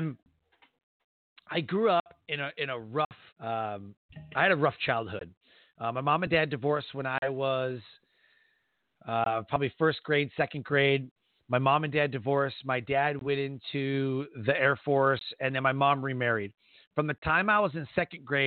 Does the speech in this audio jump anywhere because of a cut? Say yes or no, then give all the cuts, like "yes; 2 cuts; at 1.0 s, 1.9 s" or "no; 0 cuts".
yes; 1 cut; at 3.3 s